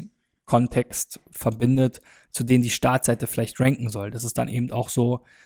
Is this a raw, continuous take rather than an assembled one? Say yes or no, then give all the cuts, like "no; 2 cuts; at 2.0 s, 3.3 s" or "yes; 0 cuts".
yes; 0 cuts